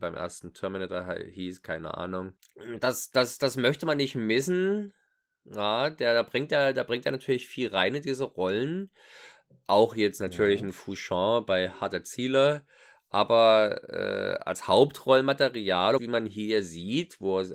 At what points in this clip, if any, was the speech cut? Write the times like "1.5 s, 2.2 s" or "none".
16.0 s